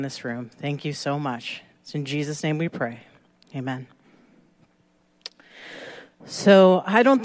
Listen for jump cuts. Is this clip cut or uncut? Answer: uncut